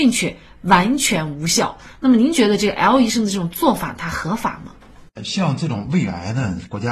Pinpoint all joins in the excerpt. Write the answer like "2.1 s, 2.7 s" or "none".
none